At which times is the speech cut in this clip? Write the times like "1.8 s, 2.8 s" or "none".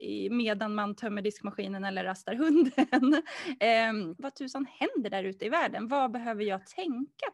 4.2 s